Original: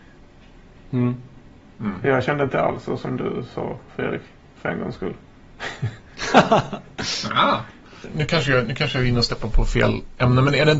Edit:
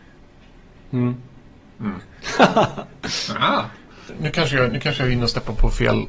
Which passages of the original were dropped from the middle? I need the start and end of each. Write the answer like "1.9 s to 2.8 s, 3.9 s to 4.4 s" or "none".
2.0 s to 5.9 s